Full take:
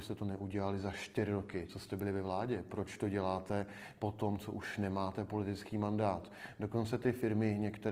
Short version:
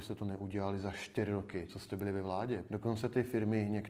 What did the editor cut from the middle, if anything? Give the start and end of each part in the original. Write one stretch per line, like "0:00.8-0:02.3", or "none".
0:02.7-0:06.6

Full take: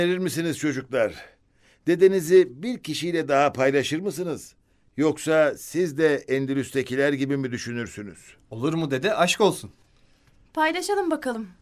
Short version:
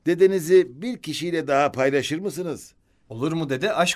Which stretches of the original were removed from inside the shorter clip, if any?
0:04.8-0:08.4

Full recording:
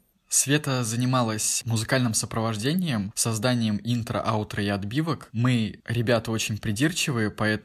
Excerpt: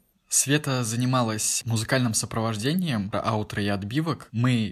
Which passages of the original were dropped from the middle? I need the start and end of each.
0:03.1-0:04.1

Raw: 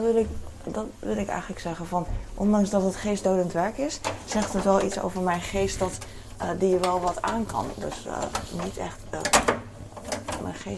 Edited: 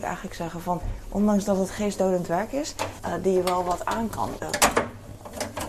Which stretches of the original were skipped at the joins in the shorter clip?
0:04.2-0:06.4
0:07.8-0:09.1

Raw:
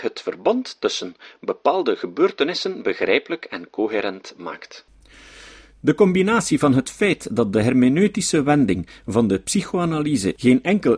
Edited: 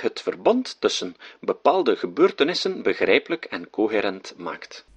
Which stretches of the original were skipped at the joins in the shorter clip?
none

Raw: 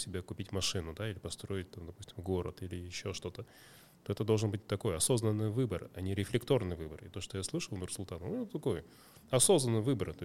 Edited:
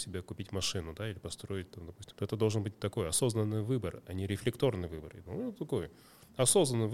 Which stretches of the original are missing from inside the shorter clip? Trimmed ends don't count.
0:02.1-0:04.0
0:07.1-0:08.2

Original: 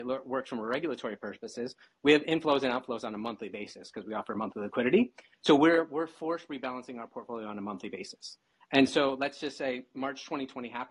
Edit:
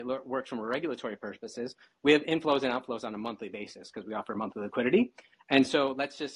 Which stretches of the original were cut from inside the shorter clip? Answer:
0:05.4-0:08.6

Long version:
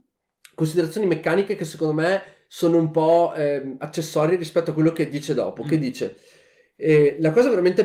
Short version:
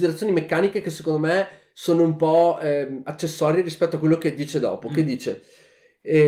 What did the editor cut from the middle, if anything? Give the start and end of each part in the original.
none

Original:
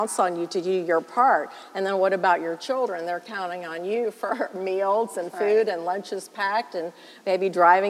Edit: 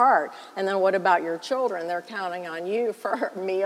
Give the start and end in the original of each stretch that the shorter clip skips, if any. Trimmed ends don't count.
none

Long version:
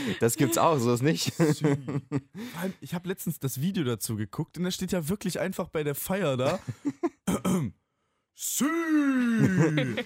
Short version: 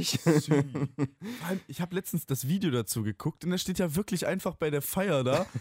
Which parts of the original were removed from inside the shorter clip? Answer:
none

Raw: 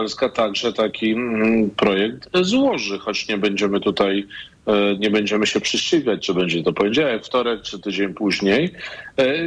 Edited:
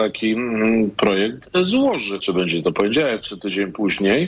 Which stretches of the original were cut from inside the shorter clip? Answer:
0:03.0-0:06.2
0:07.2-0:07.6

